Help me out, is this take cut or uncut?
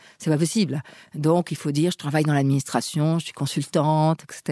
uncut